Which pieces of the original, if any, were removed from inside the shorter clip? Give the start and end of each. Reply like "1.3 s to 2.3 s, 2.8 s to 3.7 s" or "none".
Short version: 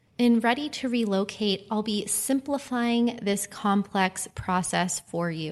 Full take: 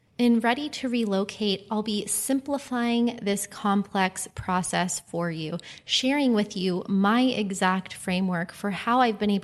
none